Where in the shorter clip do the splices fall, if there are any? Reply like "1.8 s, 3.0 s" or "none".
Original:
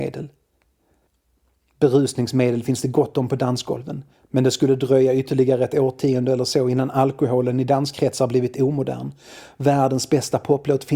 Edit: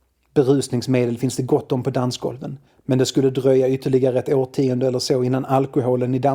none